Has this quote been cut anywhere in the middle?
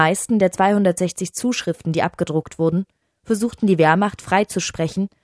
no; 0 cuts

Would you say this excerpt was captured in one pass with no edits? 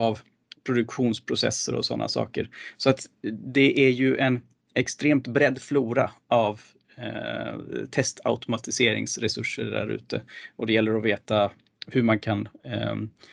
yes; 0 cuts

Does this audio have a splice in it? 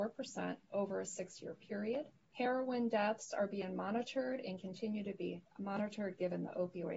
yes; 1 cut; at 2.3 s

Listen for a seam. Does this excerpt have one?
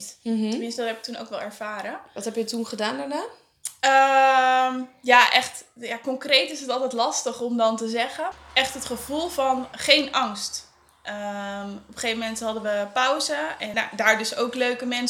yes; 2 cuts; at 8.3 s, 13.7 s

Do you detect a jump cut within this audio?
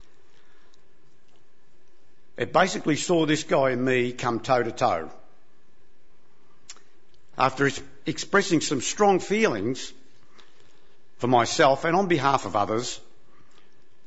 yes; 1 cut; at 7.3 s

